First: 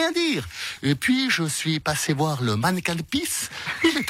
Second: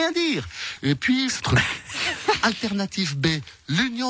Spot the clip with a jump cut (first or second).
second